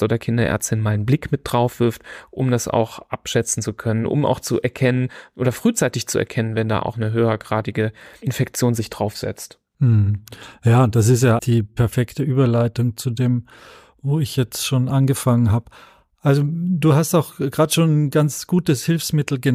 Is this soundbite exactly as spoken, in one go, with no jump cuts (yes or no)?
no